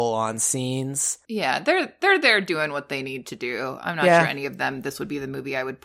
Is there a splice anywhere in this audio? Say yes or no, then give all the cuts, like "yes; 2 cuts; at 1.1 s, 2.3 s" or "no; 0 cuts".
no; 0 cuts